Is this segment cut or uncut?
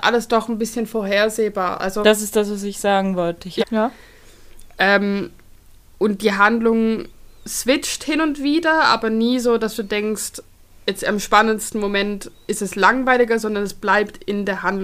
cut